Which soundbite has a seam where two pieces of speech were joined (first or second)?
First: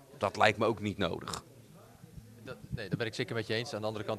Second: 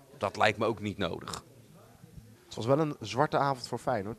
second